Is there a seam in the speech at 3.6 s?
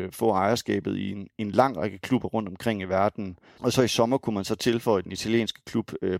yes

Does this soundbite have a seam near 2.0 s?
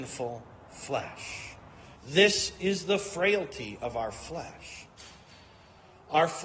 yes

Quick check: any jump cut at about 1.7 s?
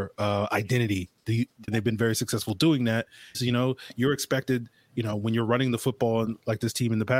yes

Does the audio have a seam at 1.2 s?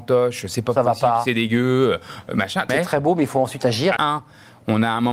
no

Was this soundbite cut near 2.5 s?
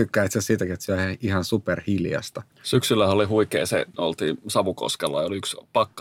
yes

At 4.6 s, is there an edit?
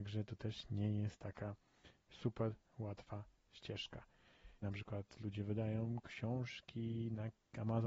yes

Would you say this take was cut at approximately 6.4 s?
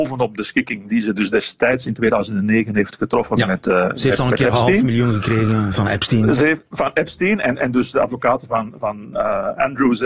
no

